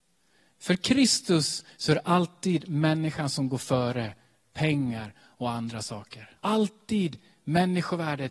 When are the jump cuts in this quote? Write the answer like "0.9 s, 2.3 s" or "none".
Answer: 6.4 s